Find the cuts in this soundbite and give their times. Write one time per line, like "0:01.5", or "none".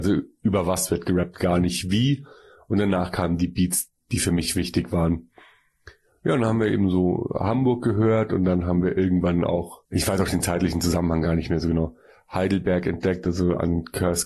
0:09.9